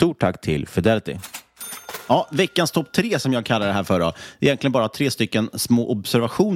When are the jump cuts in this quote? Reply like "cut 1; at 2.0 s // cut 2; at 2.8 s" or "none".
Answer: none